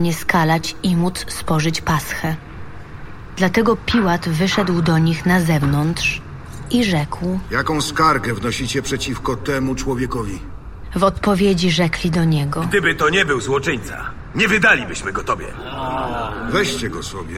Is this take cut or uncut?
uncut